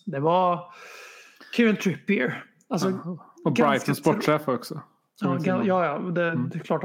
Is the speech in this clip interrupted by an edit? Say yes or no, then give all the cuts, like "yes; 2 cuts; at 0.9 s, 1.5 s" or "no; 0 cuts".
no; 0 cuts